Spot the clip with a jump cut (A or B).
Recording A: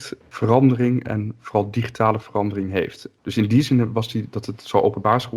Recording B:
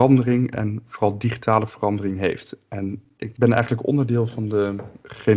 A